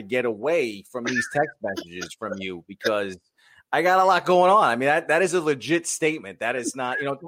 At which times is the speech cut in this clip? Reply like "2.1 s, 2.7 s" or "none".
none